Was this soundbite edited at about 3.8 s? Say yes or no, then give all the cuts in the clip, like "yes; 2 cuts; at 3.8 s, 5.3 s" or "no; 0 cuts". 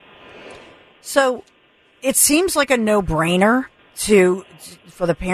yes; 1 cut; at 3.8 s